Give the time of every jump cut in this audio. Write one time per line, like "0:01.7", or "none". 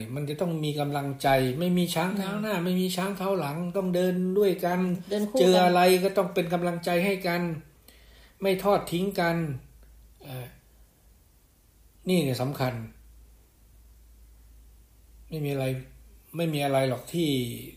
none